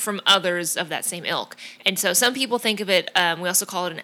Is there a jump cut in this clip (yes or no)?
yes